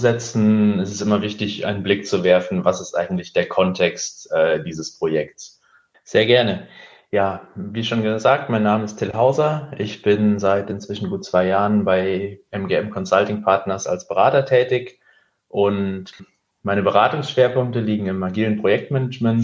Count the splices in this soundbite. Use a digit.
1